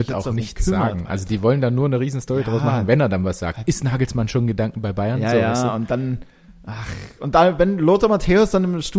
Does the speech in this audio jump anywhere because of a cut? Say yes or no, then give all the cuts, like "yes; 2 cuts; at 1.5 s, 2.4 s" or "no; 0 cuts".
no; 0 cuts